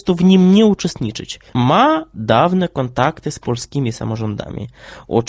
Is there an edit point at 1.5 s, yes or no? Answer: yes